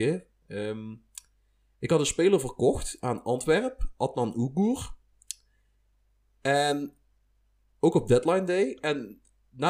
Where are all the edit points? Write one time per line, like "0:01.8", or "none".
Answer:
none